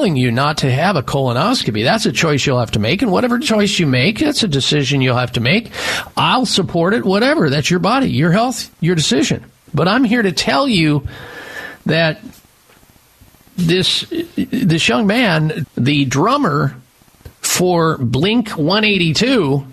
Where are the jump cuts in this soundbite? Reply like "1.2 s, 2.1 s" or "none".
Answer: 15.6 s